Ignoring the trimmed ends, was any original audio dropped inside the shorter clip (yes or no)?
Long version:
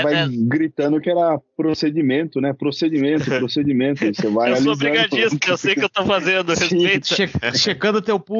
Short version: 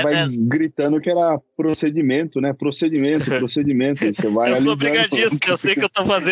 no